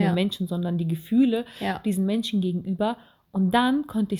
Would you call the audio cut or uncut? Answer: uncut